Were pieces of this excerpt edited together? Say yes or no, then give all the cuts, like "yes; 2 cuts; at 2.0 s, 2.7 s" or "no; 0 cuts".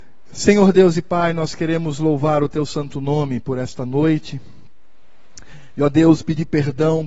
no; 0 cuts